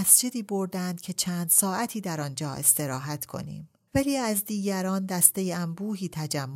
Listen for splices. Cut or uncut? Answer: cut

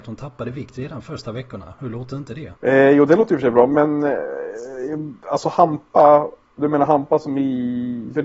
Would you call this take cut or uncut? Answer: cut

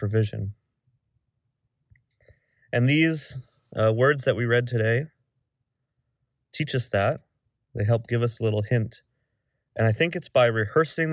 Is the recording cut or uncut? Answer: uncut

